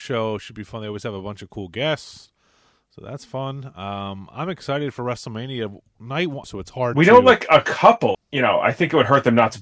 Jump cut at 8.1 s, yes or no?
yes